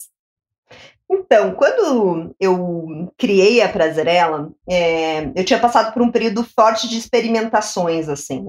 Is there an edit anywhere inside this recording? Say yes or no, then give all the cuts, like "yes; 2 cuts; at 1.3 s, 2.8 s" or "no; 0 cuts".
no; 0 cuts